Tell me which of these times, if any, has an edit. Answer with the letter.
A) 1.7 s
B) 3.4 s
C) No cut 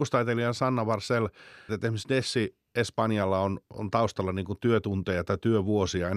A